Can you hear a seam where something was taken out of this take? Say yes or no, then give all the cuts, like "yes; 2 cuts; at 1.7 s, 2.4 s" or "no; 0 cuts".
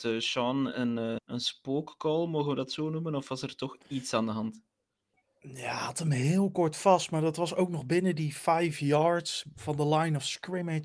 yes; 1 cut; at 1.2 s